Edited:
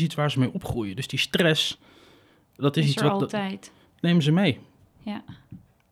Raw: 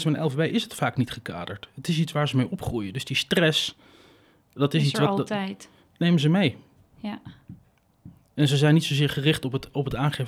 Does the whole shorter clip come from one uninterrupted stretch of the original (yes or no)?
yes